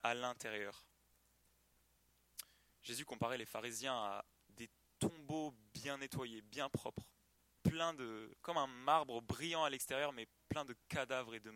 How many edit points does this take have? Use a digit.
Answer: 0